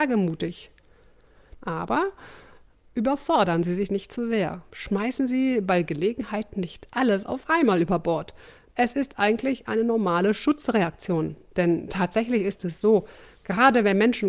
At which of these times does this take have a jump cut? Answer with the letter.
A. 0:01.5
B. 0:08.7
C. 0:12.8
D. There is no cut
B